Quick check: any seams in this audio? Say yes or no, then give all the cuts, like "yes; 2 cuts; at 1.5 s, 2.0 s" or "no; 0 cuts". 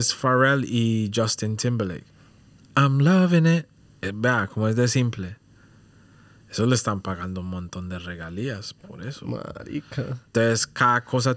no; 0 cuts